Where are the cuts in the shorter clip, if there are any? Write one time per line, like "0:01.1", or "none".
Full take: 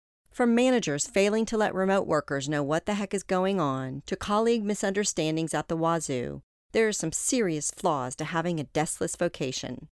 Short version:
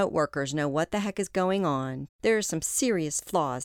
0:02.1